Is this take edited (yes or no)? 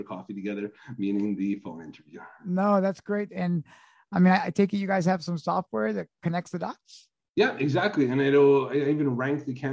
yes